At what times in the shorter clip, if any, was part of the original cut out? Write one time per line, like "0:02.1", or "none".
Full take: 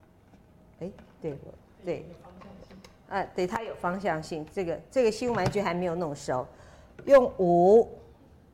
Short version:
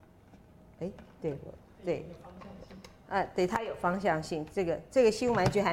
none